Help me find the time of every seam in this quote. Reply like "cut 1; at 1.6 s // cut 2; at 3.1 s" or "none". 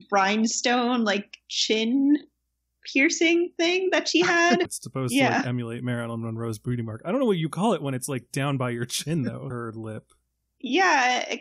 cut 1; at 4.7 s // cut 2; at 9.5 s